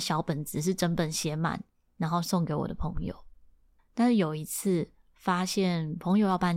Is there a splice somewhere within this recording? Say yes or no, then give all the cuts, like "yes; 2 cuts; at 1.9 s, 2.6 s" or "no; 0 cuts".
no; 0 cuts